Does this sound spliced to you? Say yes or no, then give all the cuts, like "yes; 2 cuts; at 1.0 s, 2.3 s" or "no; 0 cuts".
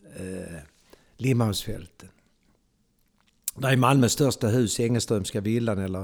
no; 0 cuts